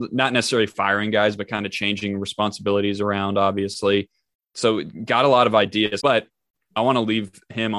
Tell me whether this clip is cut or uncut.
cut